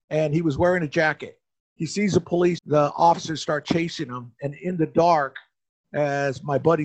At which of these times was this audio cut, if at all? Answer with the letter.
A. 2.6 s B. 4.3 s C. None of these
A